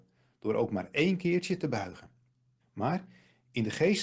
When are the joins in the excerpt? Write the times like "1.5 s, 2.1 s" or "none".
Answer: 2.6 s